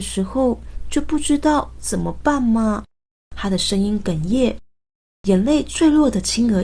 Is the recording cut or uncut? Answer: uncut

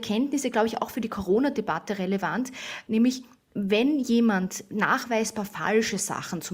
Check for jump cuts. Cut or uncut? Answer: uncut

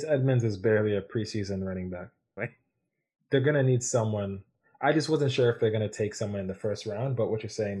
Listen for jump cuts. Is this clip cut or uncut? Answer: cut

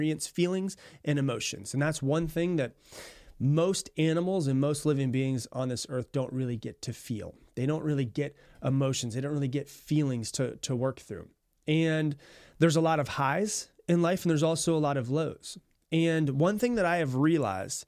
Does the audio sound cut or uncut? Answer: uncut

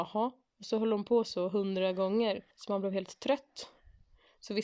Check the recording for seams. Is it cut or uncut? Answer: cut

